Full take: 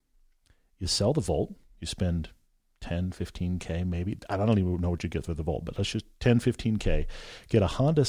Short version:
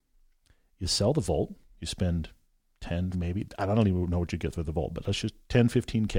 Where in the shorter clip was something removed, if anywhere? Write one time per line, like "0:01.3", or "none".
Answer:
0:03.1